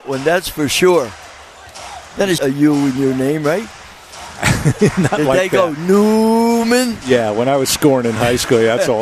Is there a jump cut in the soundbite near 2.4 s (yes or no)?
yes